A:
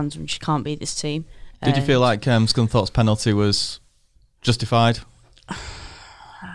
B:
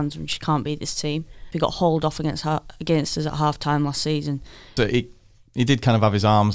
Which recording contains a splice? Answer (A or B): B